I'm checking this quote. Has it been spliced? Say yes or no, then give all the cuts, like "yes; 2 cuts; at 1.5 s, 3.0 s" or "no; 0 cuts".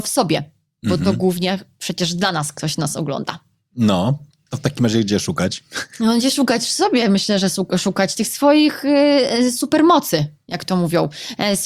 no; 0 cuts